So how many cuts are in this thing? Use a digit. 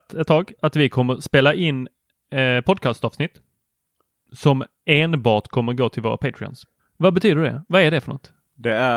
1